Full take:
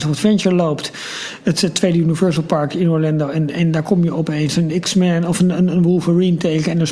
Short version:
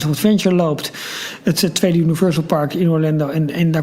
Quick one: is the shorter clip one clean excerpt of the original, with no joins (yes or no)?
yes